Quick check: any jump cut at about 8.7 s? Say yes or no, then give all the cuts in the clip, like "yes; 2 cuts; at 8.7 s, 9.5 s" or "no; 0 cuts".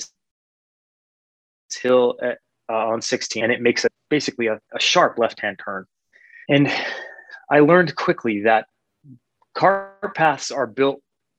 no; 2 cuts; at 4.1 s, 6.4 s